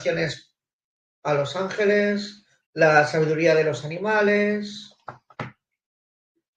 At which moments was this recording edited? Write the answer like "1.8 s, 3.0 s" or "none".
2.6 s

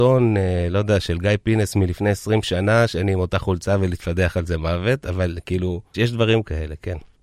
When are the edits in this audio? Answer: 5.9 s

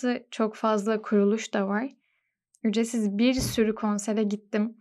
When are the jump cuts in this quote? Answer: 2.5 s

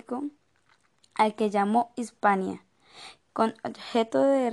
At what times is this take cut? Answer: 3.2 s

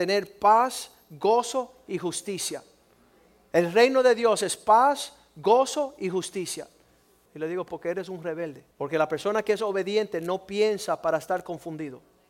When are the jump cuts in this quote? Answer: 7.3 s, 8.7 s

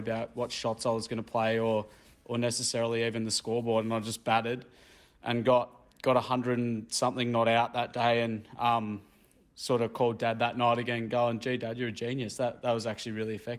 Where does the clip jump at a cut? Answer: none

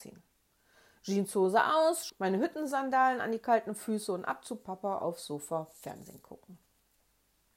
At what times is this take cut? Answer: 2.1 s

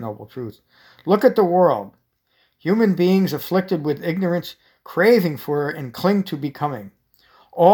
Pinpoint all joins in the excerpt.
none

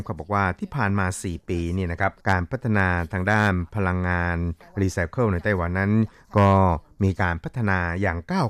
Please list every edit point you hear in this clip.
2.2 s

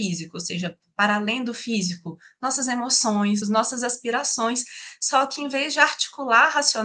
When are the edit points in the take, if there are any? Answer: 3.4 s

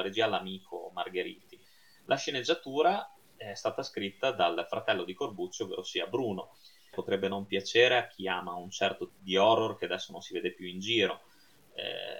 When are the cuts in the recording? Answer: 6.9 s, 9.1 s

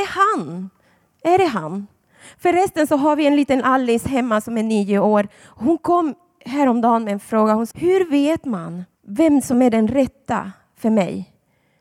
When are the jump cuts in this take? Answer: 7.7 s, 8.9 s

